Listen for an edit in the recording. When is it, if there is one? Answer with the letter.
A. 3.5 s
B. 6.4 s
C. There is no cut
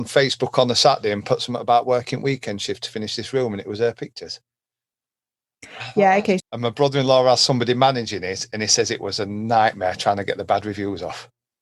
B